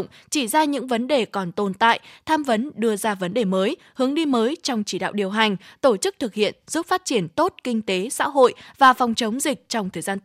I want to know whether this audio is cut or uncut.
uncut